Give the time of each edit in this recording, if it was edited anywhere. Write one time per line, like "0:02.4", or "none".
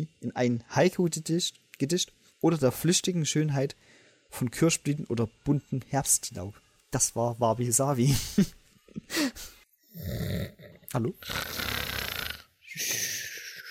none